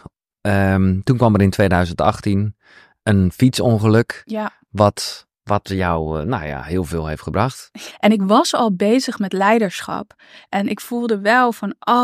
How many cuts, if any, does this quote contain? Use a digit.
2